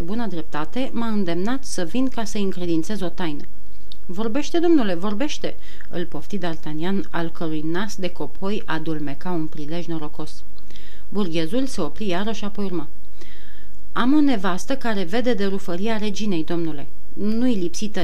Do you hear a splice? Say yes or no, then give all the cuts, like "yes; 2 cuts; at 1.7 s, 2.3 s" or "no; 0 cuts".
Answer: no; 0 cuts